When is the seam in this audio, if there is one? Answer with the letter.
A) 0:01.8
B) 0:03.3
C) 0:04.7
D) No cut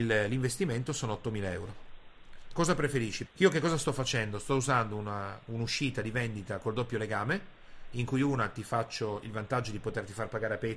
B